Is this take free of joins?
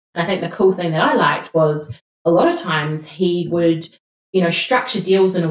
yes; 0 cuts

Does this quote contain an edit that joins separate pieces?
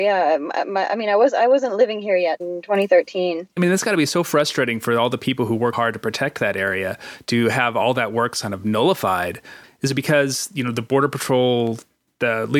yes; 3 cuts; at 2.4 s, 3.6 s, 5.7 s

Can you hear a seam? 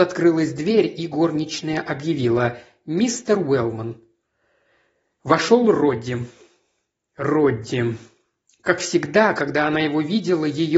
no; 0 cuts

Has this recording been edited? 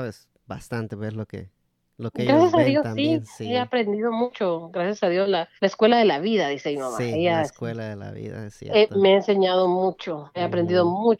yes; 1 cut; at 5.6 s

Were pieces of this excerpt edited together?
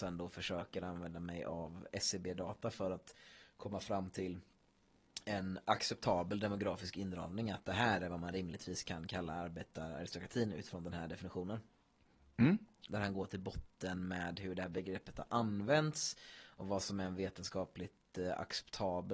yes; 1 cut; at 12.9 s

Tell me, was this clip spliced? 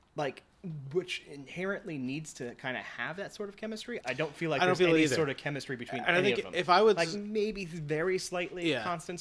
yes; 1 cut; at 4.0 s

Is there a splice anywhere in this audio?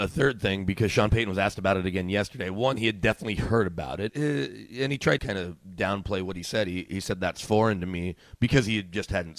yes; 2 cuts; at 4.1 s, 5.2 s

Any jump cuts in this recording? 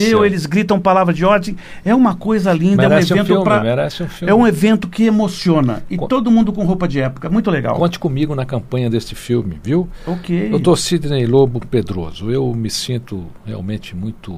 no; 0 cuts

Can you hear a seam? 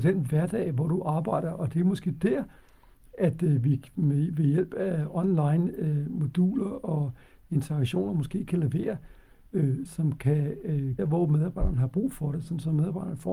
yes; 2 cuts; at 9.9 s, 11.0 s

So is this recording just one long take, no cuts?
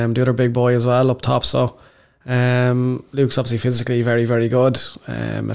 yes; 0 cuts

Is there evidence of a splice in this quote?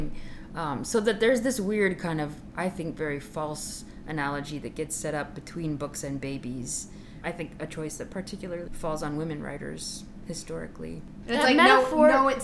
yes; 3 cuts; at 7.2 s, 8.7 s, 11.2 s

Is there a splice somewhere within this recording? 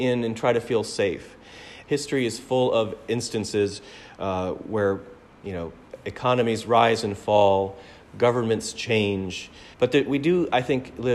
yes; 2 cuts; at 1.8 s, 9.7 s

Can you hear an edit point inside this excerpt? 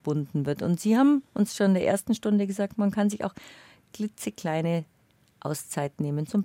no; 0 cuts

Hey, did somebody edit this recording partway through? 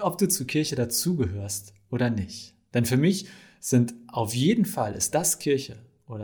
no; 0 cuts

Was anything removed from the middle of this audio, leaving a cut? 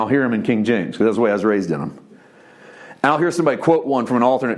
no; 0 cuts

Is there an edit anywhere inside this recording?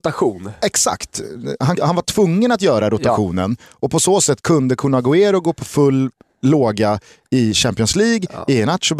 yes; 1 cut; at 1.8 s

